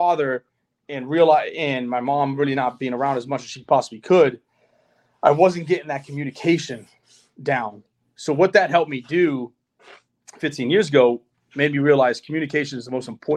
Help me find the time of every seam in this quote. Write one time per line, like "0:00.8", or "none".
none